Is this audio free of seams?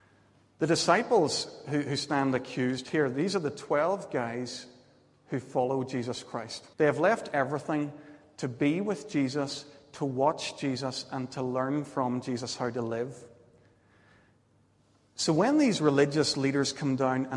no; 1 cut; at 6.7 s

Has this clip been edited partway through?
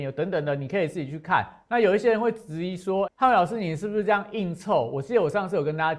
yes; 1 cut; at 3.1 s

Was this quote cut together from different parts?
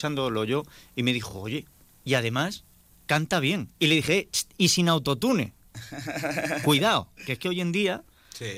no; 0 cuts

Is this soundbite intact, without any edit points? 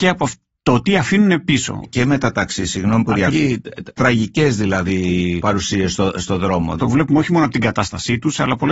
no; 3 cuts; at 1.8 s, 3.3 s, 6.8 s

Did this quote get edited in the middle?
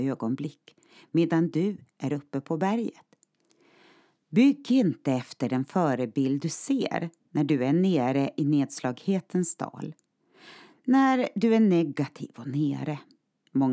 no; 0 cuts

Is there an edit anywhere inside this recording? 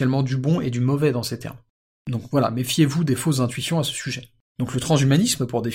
yes; 1 cut; at 4.6 s

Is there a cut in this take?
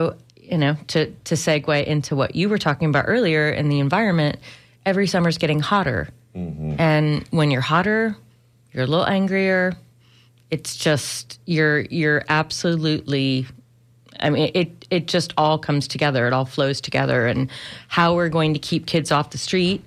no; 0 cuts

